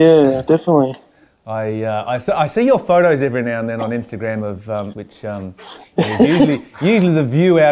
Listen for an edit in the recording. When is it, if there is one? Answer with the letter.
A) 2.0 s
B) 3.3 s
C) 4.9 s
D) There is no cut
C